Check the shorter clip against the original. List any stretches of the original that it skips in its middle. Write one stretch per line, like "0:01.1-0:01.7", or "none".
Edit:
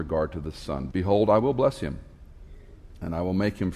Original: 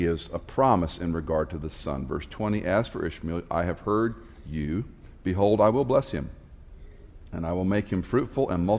0:02.1-0:05.2